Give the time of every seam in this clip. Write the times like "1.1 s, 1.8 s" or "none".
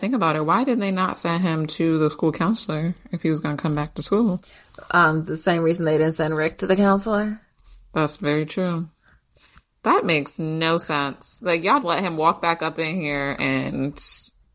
11.8 s